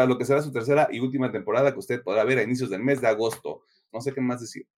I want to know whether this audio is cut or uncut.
cut